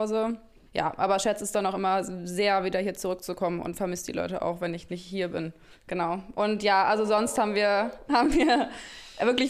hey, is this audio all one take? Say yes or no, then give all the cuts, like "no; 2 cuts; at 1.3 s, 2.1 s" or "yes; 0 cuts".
yes; 0 cuts